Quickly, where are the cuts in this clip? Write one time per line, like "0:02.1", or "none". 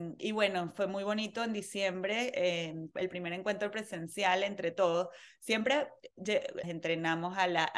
0:02.9
0:06.6